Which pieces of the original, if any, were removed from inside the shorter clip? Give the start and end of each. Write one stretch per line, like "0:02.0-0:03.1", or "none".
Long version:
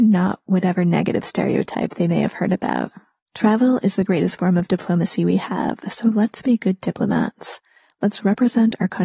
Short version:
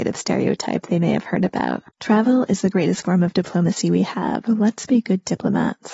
0:03.0-0:03.2
0:05.8-0:06.0